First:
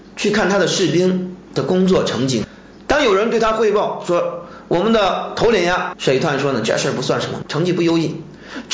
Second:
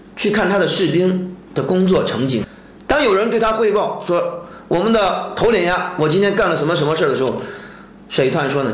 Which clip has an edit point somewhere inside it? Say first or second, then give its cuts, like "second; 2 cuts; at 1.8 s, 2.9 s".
first; 2 cuts; at 5.9 s, 7.4 s